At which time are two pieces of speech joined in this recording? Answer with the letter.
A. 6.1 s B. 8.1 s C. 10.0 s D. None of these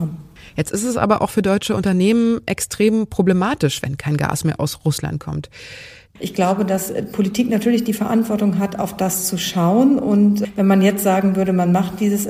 A